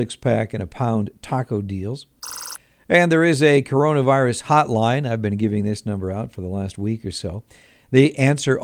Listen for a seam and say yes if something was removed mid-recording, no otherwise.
no